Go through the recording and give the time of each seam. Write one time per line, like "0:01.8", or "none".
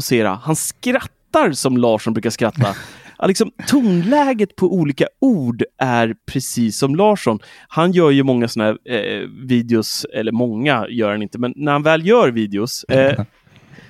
0:12.9